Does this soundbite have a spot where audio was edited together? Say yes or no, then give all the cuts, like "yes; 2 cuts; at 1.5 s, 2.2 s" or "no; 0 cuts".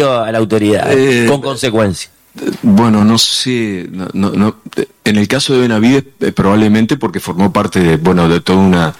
no; 0 cuts